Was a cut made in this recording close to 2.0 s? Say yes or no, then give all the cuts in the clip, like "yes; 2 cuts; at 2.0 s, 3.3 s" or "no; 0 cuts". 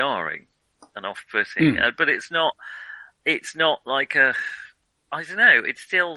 no; 0 cuts